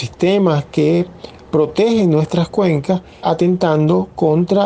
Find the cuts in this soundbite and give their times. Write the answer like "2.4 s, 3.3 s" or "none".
3.2 s